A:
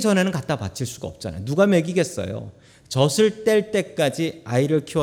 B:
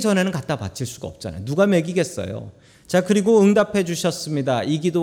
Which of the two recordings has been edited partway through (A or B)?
B